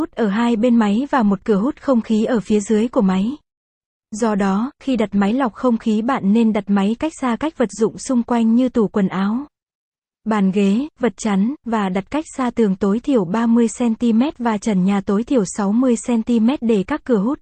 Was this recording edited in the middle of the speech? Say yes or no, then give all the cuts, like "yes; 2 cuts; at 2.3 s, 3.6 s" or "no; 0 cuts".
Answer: no; 0 cuts